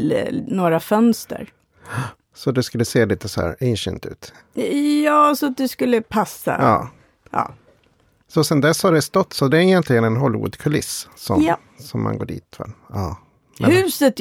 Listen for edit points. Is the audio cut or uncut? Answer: uncut